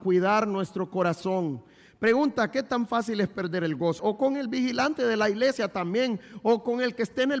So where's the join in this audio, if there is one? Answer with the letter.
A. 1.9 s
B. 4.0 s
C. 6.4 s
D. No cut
B